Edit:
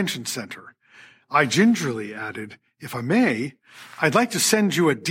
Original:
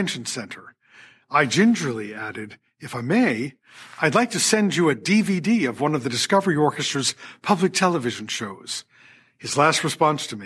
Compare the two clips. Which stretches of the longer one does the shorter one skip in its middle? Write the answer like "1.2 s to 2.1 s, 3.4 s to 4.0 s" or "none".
none